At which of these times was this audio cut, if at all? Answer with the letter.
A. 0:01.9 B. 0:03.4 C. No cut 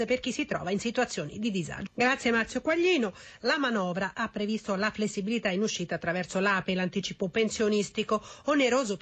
A